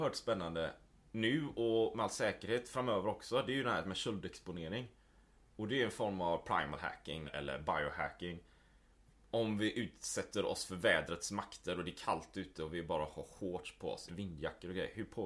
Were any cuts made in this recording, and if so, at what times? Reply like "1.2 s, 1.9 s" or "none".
7.3 s, 14.1 s